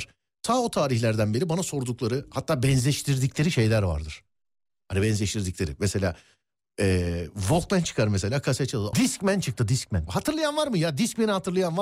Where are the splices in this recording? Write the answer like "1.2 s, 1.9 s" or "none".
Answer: 8.9 s, 10.1 s